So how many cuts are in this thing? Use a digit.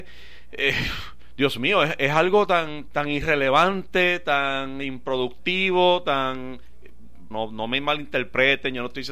2